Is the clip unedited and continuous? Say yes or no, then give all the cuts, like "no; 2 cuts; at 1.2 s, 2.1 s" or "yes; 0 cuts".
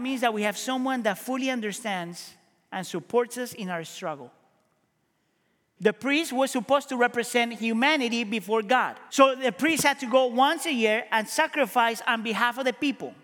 no; 2 cuts; at 5.8 s, 9.1 s